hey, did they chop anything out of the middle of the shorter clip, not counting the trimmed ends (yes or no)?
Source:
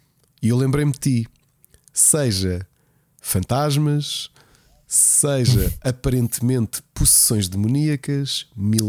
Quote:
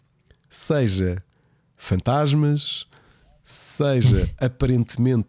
no